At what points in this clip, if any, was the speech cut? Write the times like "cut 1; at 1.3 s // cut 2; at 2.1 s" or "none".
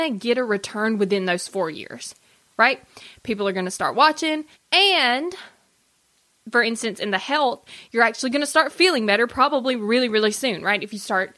cut 1; at 4.5 s